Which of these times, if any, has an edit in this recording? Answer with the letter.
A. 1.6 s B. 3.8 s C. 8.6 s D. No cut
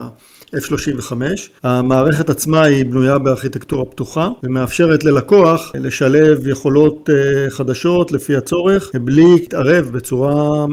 A